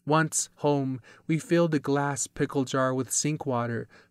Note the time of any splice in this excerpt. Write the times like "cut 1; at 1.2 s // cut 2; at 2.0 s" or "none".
none